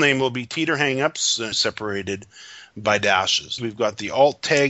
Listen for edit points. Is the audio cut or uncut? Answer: cut